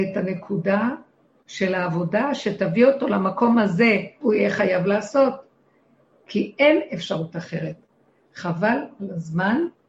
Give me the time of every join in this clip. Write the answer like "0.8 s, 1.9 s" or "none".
4.2 s